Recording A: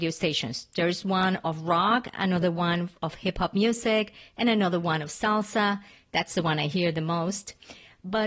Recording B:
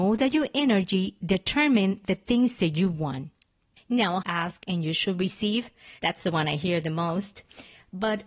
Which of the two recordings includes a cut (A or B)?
B